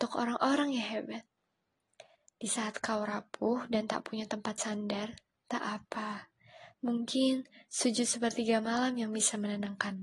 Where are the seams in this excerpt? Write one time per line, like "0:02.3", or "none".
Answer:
0:06.7